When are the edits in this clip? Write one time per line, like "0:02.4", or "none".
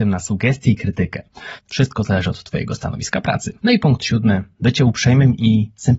0:01.6
0:03.6